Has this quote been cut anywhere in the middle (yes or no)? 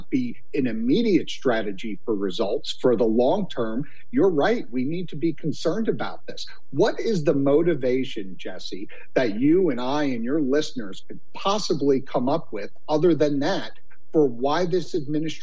no